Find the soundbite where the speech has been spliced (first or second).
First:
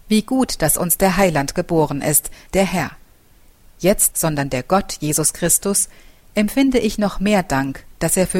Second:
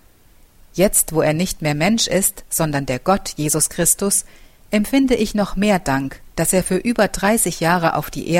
first